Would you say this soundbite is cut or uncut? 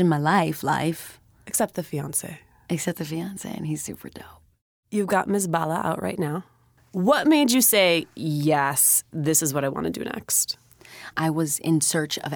uncut